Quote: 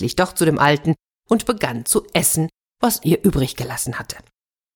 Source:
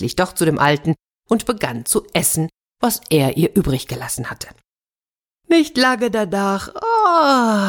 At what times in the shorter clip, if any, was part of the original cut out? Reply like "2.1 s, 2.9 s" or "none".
3.0 s